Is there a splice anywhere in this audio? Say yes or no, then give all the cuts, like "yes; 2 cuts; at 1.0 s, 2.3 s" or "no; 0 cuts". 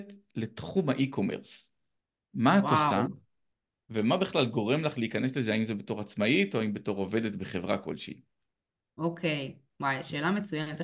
no; 0 cuts